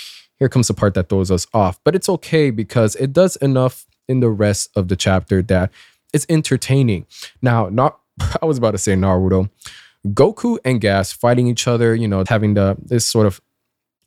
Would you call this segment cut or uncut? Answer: cut